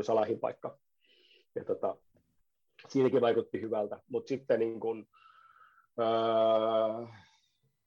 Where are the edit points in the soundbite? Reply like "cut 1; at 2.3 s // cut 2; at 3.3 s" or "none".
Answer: none